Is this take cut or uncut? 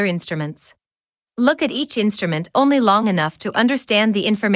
cut